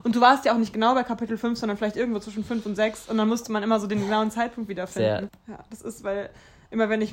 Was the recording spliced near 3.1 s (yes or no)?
no